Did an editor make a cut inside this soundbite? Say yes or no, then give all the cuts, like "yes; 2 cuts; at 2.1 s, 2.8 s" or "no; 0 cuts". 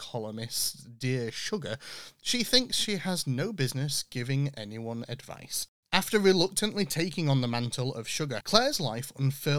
yes; 1 cut; at 8.4 s